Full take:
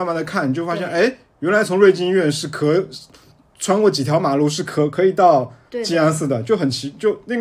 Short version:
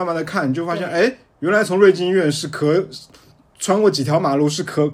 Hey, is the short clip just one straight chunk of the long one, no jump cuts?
yes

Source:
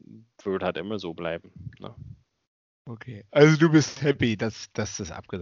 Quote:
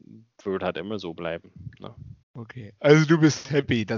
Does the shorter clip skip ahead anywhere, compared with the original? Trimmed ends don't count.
yes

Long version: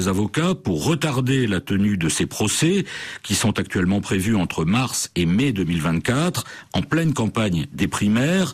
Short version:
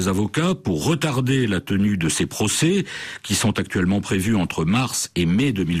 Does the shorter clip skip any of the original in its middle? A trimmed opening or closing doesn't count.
no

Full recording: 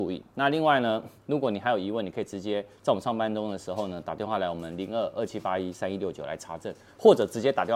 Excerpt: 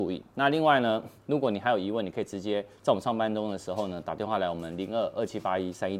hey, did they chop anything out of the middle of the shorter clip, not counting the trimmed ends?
no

